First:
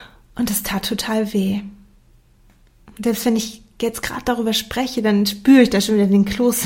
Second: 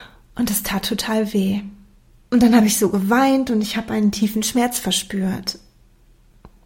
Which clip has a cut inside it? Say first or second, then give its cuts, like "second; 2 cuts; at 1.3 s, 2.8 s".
second; 1 cut; at 2.2 s